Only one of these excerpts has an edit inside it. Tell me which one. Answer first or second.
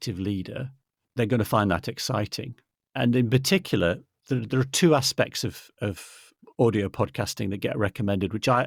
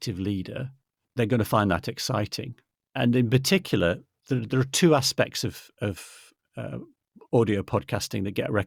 first